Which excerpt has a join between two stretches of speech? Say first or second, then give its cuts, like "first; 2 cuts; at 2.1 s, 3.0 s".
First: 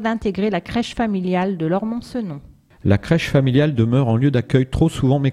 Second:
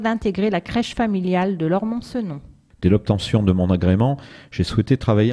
second; 1 cut; at 2.7 s